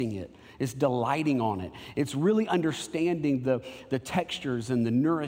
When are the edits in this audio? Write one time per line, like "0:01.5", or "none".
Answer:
none